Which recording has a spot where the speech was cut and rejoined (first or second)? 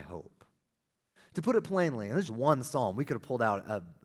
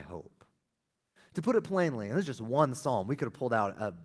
first